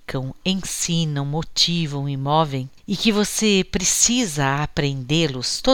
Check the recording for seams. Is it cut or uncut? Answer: cut